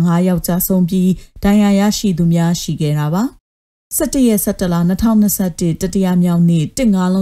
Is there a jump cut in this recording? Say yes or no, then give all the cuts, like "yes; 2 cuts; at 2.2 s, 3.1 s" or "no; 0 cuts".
yes; 1 cut; at 3.4 s